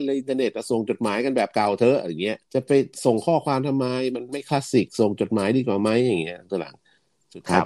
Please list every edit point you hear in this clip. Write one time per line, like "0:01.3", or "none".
0:02.4